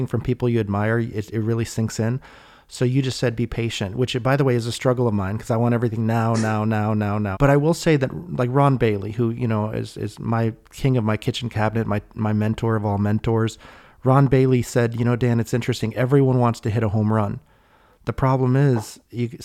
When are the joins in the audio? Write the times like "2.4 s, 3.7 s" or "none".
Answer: 7.3 s

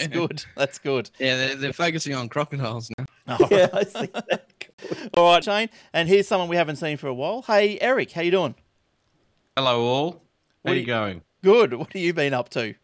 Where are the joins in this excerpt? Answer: 5.4 s

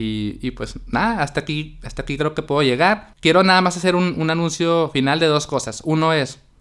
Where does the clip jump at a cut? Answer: 3.1 s

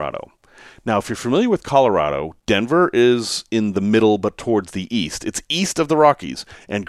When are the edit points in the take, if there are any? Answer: none

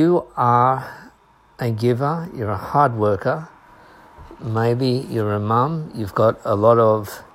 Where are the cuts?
none

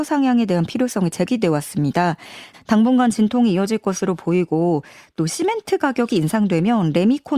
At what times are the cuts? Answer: 2.5 s

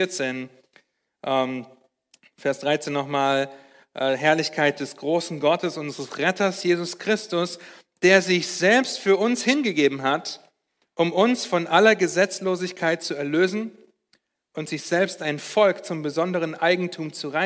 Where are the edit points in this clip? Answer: none

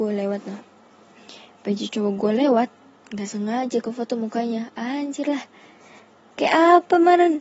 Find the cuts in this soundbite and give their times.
none

